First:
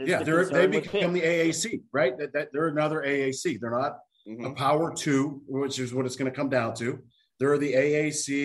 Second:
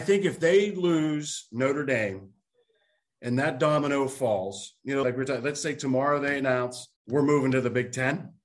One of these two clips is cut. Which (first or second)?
second